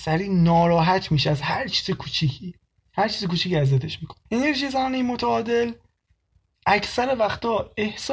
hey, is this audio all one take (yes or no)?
no